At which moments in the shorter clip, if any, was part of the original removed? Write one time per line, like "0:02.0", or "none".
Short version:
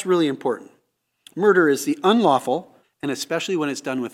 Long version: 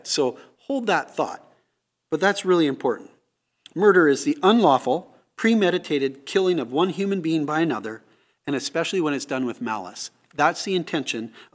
0:02.8